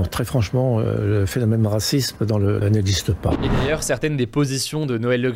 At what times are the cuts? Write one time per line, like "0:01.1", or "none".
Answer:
0:02.6